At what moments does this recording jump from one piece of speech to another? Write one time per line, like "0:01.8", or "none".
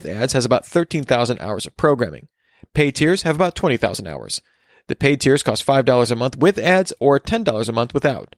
none

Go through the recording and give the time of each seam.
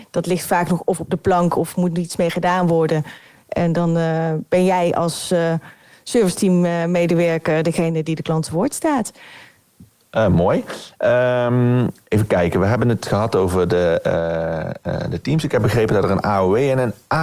none

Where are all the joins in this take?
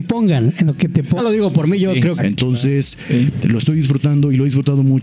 0:01.2
0:02.2

